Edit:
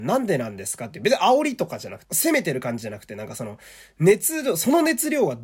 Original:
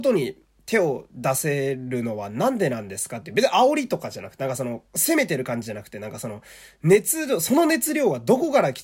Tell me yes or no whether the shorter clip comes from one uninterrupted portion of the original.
no